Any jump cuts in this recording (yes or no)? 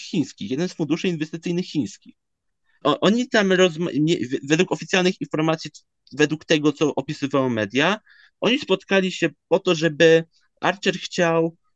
yes